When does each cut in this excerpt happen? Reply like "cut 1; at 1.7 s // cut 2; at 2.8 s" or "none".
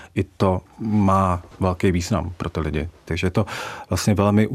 cut 1; at 3.1 s